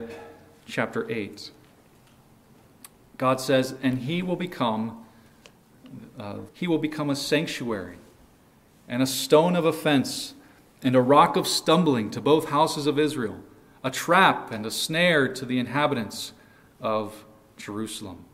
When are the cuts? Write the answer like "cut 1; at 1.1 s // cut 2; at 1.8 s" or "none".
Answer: cut 1; at 6.5 s